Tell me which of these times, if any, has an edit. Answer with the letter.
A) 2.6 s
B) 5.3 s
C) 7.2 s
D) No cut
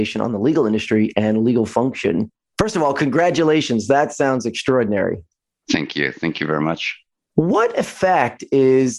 D